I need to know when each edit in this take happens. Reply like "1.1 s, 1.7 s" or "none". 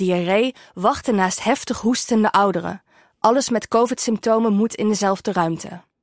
none

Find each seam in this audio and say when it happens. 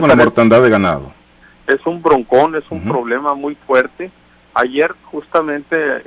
none

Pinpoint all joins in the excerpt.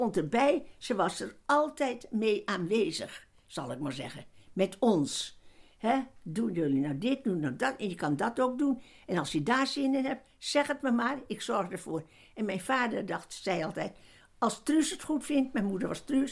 none

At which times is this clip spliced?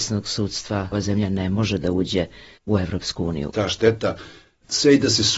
0.9 s, 3.5 s

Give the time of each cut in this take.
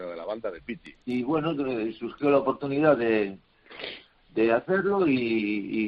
1.0 s

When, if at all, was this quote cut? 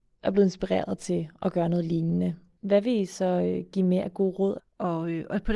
4.6 s

